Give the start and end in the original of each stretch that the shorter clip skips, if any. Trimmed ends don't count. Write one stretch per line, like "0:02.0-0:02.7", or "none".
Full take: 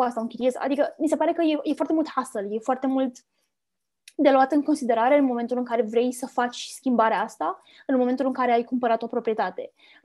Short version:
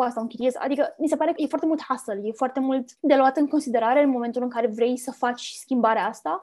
0:01.4-0:01.6
0:03.2-0:04.1